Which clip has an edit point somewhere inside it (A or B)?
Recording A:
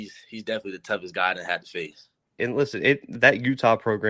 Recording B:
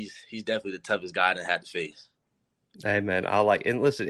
A